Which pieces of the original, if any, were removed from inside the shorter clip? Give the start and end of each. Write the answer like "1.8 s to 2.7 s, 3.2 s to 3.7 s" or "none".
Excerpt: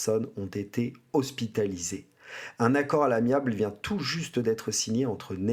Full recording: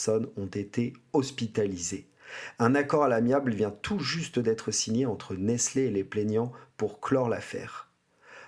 none